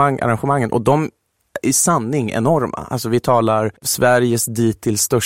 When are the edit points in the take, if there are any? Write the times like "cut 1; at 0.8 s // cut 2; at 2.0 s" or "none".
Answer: cut 1; at 3.8 s